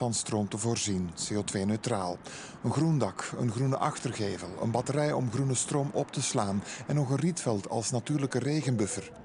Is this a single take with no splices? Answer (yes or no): yes